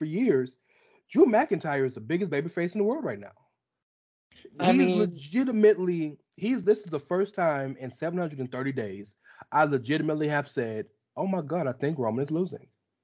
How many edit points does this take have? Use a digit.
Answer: 0